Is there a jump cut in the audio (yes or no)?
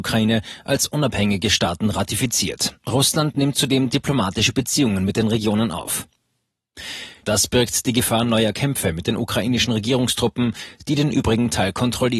yes